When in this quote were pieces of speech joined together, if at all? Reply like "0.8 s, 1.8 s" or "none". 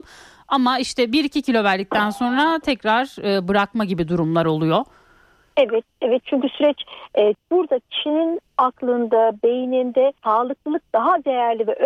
7.3 s, 10.2 s